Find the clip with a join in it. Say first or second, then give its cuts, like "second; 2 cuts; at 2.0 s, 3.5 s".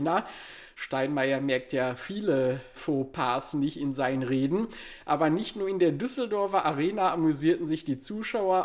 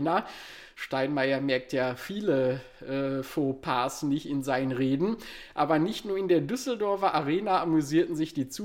first; 1 cut; at 2.8 s